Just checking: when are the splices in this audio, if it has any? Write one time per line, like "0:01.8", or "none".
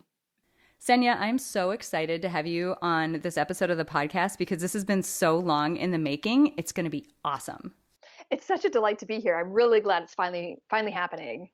none